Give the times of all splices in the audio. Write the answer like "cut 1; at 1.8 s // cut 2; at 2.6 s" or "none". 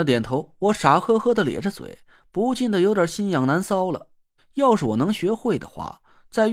cut 1; at 4.4 s